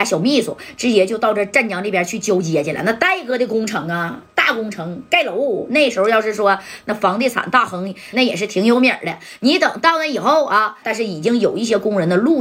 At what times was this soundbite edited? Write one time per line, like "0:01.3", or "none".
0:08.1
0:10.8

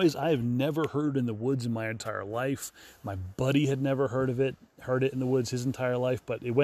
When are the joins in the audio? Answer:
none

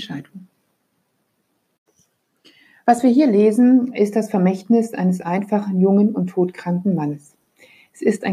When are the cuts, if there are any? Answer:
none

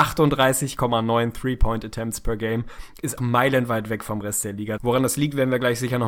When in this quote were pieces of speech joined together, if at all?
0:03.2
0:04.8

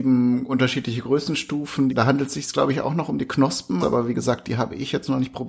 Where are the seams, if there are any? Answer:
0:01.9
0:03.8

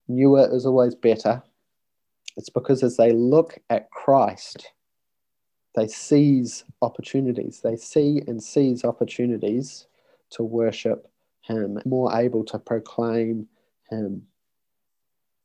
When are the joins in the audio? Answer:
0:11.8

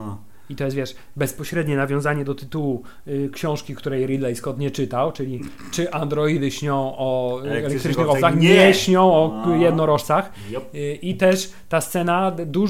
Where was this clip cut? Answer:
none

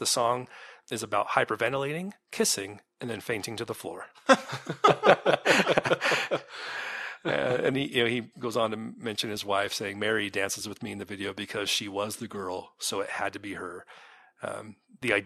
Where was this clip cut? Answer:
0:07.7

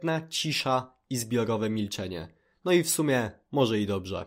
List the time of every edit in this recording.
none

